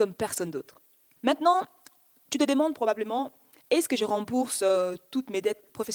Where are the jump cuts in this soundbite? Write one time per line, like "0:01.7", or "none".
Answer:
0:01.1